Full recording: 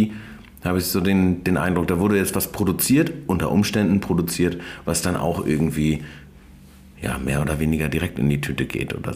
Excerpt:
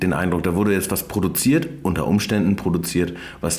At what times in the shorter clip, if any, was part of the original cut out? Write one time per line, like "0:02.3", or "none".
none